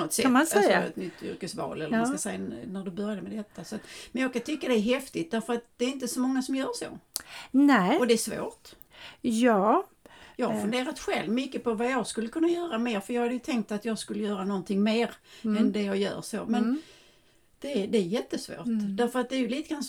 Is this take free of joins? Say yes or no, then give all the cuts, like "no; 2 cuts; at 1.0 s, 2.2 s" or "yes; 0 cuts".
yes; 0 cuts